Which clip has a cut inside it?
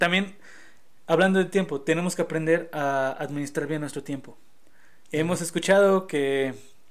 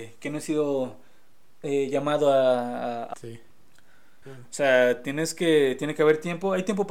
second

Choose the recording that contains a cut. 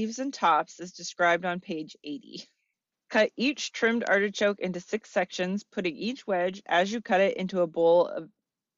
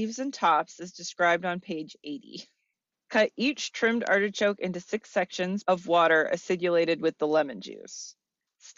second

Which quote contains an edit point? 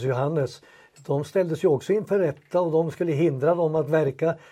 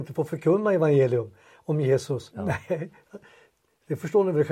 second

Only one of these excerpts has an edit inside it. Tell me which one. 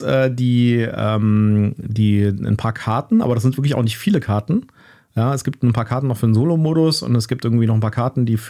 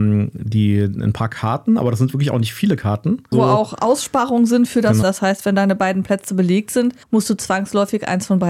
second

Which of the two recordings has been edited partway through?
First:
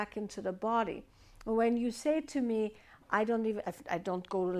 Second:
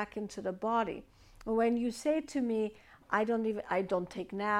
first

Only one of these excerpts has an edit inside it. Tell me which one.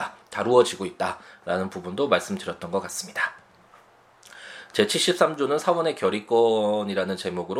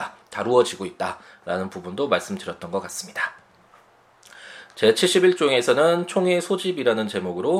second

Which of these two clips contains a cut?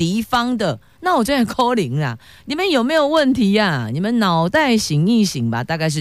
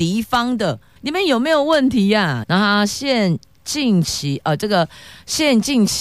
second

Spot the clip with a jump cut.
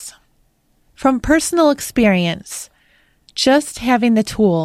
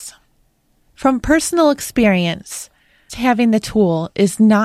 second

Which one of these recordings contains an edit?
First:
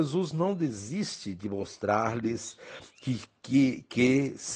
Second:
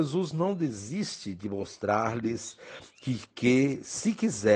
second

